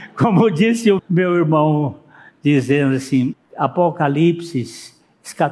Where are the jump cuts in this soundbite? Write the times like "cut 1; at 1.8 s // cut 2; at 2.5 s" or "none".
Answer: cut 1; at 1.0 s // cut 2; at 3.3 s